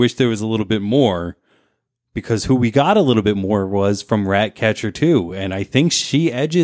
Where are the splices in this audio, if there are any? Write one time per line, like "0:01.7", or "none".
none